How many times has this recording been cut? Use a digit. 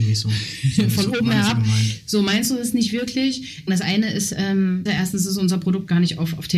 2